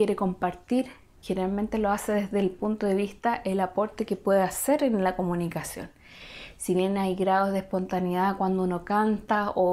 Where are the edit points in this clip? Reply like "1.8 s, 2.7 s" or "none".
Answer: 1.2 s